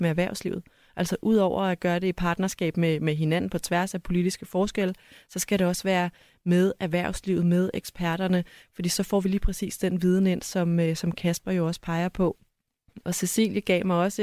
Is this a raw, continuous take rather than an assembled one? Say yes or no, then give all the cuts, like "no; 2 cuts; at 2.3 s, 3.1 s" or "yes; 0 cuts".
yes; 0 cuts